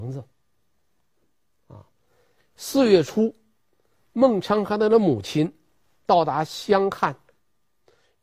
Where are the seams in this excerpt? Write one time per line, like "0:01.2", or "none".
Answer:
0:02.4